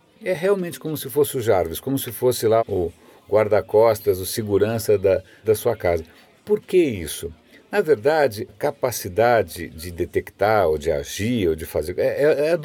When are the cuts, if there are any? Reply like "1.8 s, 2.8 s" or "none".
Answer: 2.6 s, 5.4 s, 8.5 s